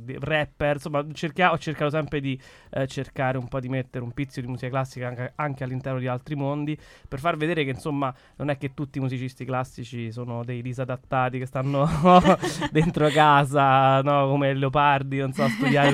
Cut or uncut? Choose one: uncut